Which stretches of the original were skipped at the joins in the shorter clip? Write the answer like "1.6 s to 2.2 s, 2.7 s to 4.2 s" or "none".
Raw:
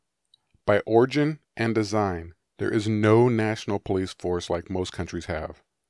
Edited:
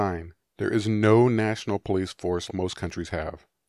4.5 s to 4.6 s